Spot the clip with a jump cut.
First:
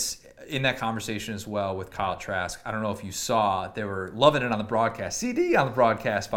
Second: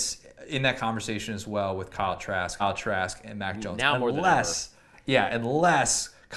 second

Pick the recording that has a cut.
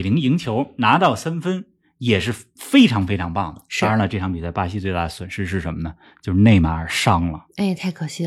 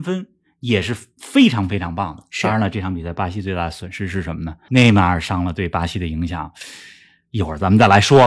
second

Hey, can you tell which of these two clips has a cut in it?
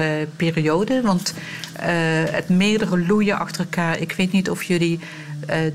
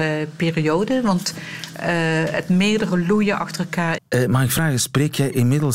second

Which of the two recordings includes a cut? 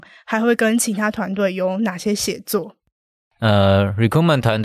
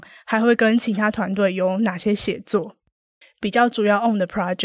second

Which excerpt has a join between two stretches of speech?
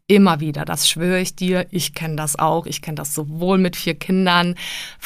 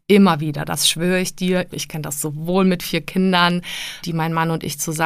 second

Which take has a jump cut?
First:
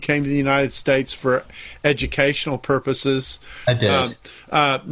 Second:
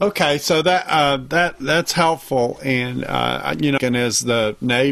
second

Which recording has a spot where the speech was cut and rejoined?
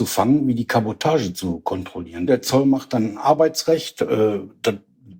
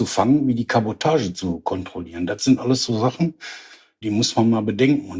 first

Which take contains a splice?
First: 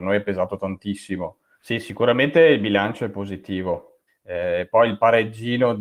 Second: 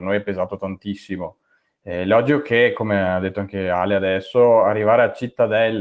first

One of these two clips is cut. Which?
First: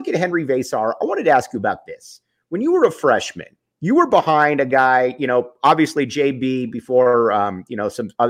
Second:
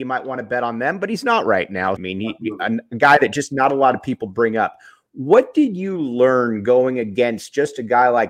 second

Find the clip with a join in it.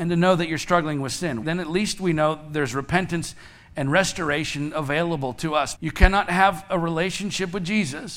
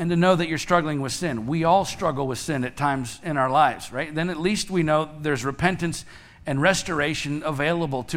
first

